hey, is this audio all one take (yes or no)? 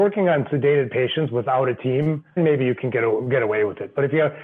no